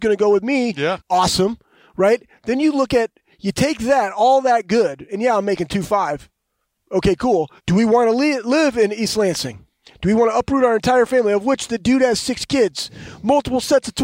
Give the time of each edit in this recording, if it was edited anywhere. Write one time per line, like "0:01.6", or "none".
0:01.0
0:07.6